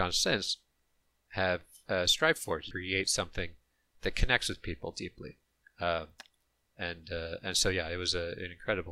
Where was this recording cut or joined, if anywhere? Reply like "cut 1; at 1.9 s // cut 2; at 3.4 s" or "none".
cut 1; at 2.7 s